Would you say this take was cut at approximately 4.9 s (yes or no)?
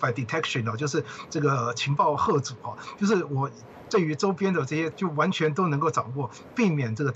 yes